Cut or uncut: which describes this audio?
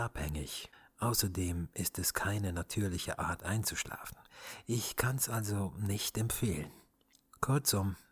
uncut